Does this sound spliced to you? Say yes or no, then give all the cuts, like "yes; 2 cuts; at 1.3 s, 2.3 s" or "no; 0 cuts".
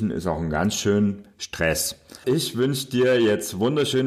yes; 1 cut; at 2.2 s